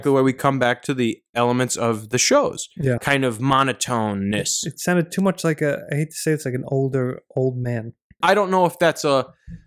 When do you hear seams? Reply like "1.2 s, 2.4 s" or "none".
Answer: 3.0 s, 8.2 s